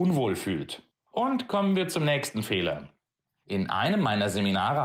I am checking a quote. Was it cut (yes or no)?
yes